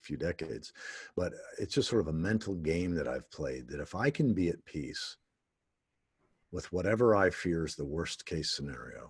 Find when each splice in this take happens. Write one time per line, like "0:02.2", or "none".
none